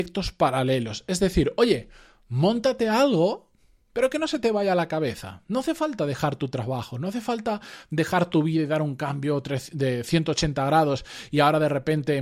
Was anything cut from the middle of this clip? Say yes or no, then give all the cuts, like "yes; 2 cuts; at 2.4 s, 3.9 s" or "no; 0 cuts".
no; 0 cuts